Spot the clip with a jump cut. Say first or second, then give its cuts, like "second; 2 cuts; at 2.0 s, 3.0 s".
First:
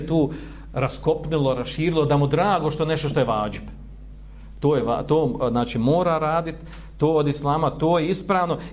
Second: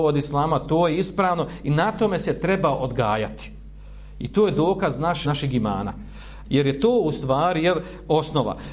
second; 2 cuts; at 5.2 s, 6.5 s